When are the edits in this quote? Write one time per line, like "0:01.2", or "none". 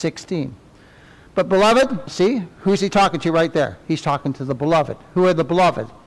0:02.1